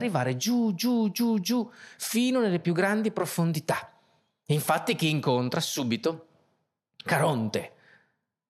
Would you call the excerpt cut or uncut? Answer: uncut